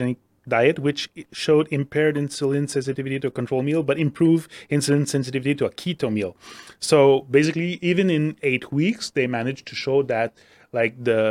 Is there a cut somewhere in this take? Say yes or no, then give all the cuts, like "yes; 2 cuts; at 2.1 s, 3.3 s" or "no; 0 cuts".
no; 0 cuts